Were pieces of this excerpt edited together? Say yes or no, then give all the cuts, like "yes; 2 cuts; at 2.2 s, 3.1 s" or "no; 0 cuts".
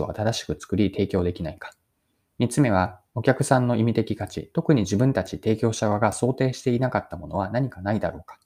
no; 0 cuts